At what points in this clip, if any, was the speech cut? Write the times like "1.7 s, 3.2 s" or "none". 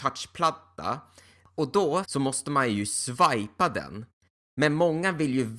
2.0 s